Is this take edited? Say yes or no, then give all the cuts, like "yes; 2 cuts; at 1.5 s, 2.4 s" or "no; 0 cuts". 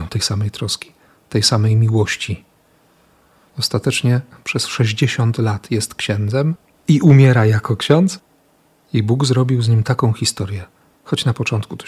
no; 0 cuts